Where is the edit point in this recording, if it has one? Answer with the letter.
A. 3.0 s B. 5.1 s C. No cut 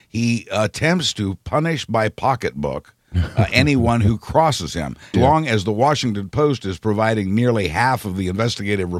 B